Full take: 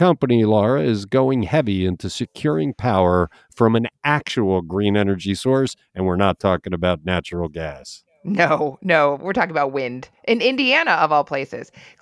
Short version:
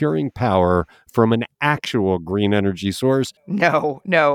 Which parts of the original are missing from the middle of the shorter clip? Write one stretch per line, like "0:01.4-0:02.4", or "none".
0:05.8-0:08.1